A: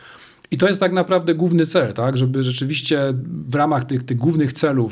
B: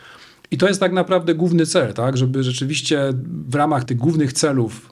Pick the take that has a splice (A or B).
B